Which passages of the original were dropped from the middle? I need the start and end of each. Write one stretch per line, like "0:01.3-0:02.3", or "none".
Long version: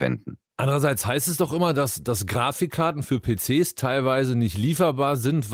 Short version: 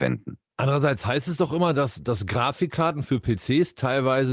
none